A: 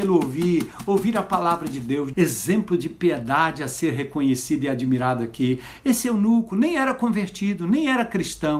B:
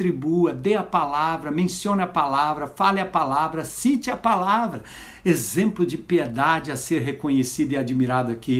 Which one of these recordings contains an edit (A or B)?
A